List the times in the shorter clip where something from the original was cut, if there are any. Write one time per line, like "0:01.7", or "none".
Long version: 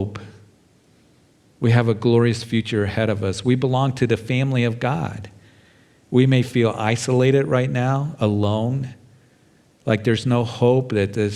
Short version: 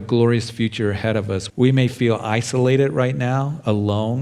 0:01.5